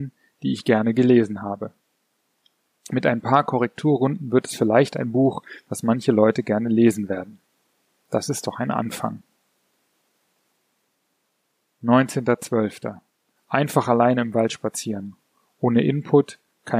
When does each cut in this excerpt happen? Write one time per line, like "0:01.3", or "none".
0:13.3